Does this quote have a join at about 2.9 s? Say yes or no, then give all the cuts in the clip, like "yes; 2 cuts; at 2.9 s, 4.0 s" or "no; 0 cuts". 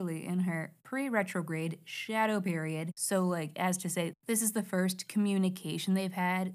yes; 1 cut; at 2.9 s